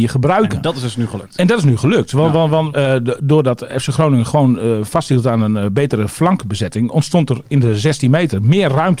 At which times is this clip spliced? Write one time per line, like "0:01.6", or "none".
0:02.7